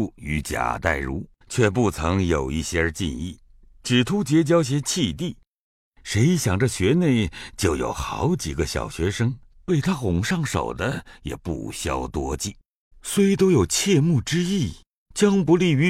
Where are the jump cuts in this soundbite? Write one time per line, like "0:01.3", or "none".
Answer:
0:09.5
0:12.9